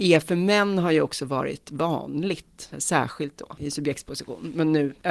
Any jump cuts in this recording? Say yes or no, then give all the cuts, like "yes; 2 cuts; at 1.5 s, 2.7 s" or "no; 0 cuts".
no; 0 cuts